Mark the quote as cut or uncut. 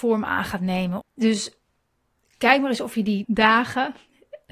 cut